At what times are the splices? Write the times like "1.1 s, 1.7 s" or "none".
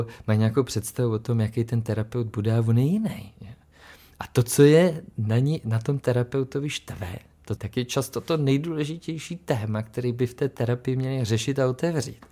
7.6 s